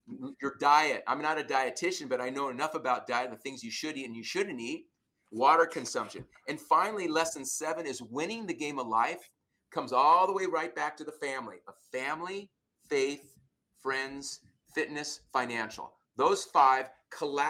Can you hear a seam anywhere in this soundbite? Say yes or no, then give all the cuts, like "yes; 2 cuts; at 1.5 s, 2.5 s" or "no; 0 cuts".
no; 0 cuts